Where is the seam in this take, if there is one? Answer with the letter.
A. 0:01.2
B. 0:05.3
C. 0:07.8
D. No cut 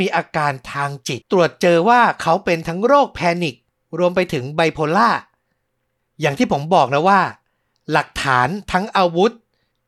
A